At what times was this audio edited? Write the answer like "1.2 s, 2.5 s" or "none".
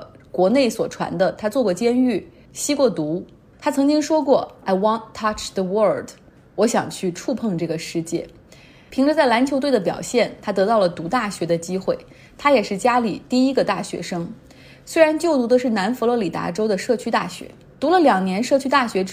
3.5 s